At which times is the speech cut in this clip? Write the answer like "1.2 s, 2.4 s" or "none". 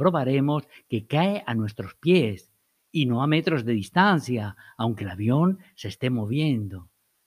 none